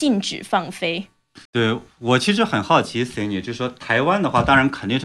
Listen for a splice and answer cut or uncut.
cut